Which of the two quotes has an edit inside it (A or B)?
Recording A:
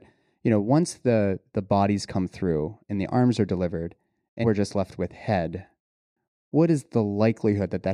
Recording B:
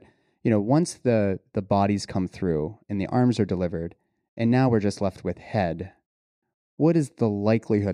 A